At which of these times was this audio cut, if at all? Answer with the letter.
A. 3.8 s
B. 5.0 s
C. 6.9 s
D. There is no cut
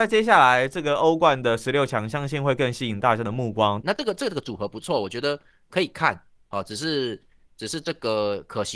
A